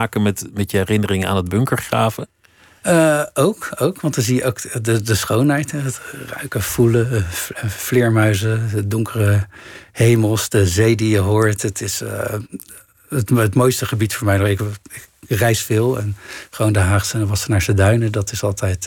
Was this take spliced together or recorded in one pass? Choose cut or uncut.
uncut